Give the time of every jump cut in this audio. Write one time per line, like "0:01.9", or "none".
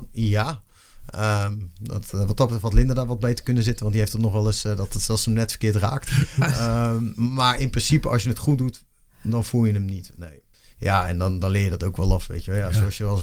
none